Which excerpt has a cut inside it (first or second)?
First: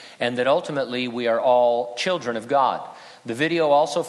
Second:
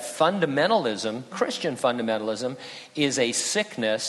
second